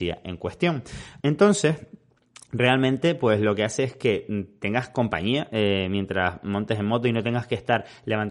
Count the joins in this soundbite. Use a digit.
1